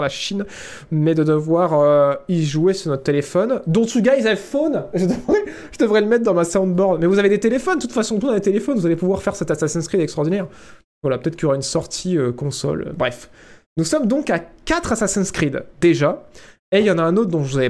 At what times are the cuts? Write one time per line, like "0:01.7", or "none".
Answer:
none

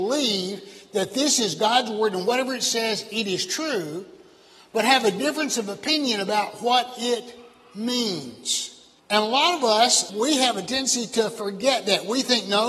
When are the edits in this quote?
0:09.0
0:10.1

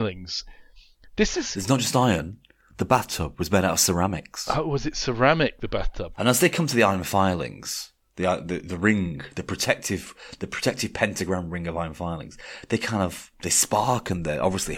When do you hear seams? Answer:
0:06.1

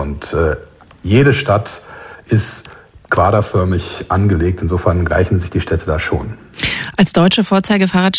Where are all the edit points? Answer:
none

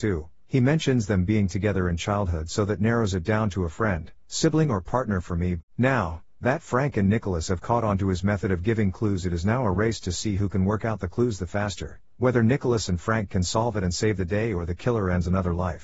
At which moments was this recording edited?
0:05.6

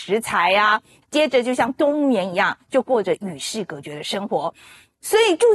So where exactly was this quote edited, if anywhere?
0:01.0

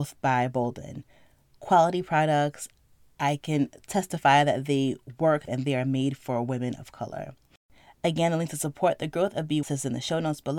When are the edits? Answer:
0:05.5
0:09.6

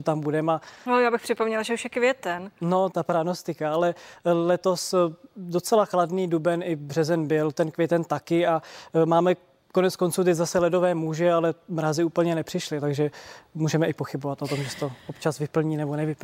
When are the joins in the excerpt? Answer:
0:02.9

